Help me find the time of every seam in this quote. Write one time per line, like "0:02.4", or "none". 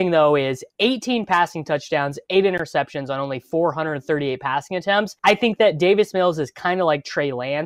0:05.2

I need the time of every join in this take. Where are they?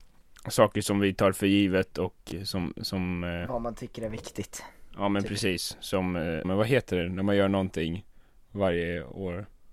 0:06.4

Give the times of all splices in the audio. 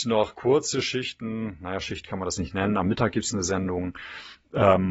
none

